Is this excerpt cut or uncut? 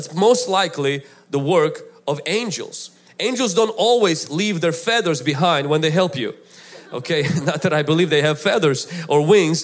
uncut